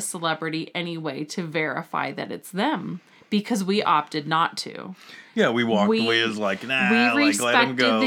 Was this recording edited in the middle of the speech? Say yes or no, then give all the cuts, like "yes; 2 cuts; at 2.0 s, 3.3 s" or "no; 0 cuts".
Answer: no; 0 cuts